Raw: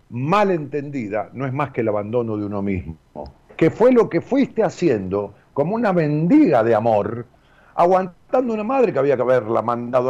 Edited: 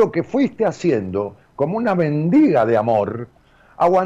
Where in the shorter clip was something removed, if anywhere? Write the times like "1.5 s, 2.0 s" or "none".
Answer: none